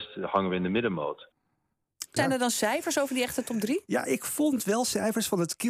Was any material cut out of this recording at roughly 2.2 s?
yes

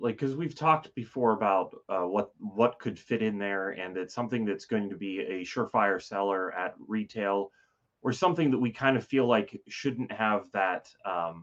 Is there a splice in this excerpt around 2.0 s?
no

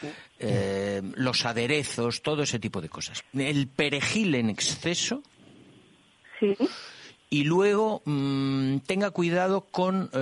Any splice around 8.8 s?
no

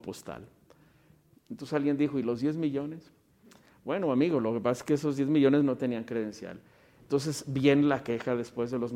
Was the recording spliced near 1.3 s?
yes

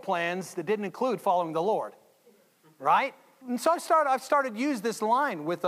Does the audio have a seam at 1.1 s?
no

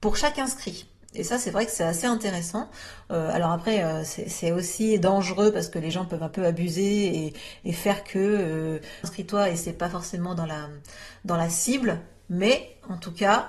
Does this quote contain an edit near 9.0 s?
yes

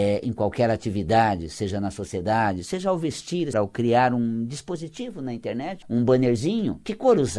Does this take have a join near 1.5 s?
no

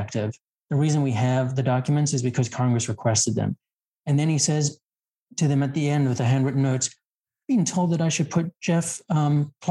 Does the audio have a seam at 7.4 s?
no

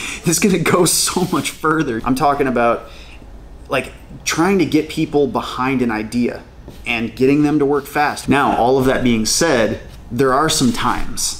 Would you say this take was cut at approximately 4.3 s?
no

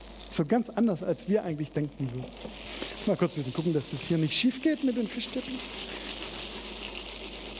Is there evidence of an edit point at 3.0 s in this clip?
no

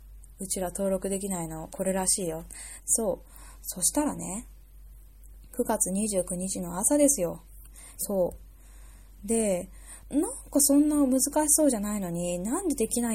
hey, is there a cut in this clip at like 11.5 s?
no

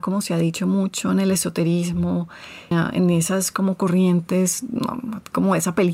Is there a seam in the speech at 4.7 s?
no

